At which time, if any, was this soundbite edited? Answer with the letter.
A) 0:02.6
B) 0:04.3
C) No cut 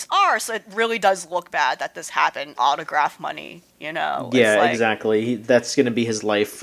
A